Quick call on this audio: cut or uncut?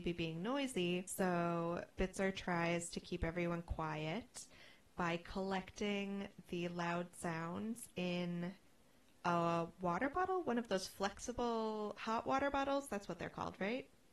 cut